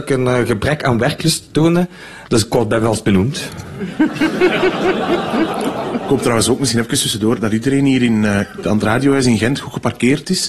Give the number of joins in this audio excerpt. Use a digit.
0